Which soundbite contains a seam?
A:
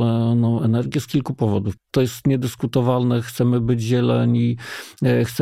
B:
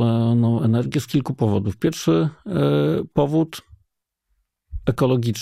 A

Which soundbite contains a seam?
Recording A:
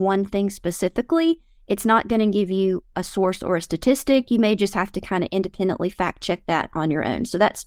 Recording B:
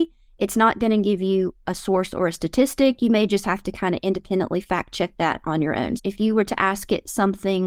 B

